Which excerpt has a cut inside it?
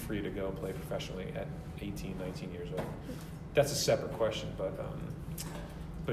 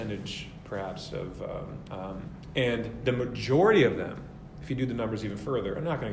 second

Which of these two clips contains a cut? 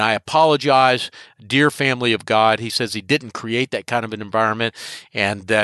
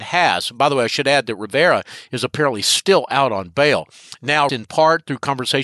second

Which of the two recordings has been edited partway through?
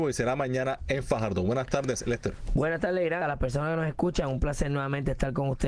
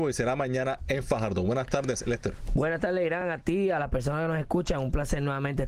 first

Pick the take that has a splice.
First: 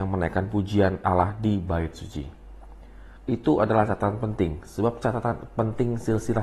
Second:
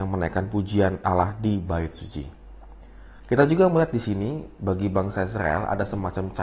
first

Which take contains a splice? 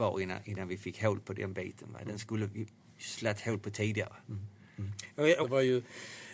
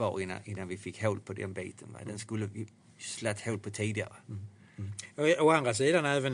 first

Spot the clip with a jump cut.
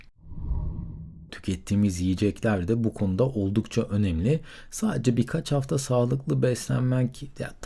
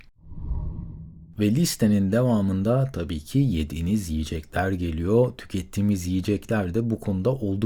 first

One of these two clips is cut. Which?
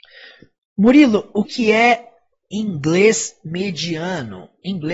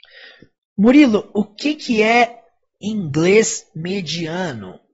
first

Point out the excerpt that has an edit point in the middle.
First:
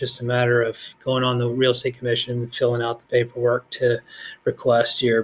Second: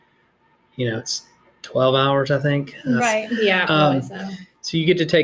second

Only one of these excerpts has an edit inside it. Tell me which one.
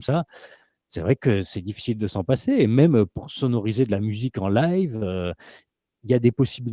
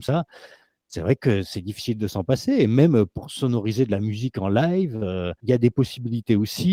second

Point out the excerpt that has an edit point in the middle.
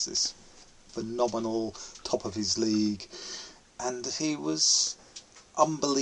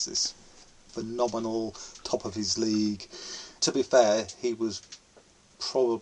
second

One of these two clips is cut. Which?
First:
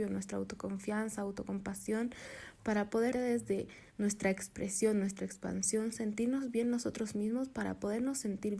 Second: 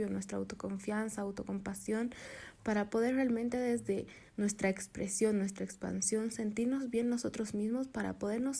first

